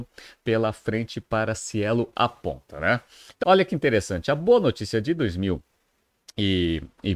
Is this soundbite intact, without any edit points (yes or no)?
no